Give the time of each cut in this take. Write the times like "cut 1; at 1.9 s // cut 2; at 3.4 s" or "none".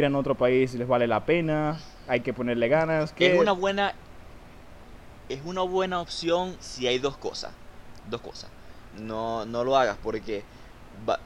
cut 1; at 6.6 s // cut 2; at 8.9 s